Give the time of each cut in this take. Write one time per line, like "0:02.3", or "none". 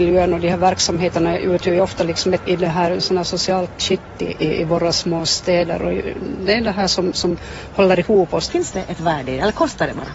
0:02.5
0:08.5